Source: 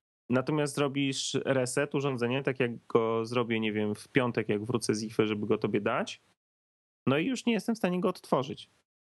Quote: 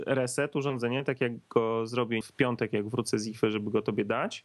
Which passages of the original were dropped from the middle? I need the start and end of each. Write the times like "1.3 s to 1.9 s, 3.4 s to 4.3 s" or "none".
3.6 s to 4.0 s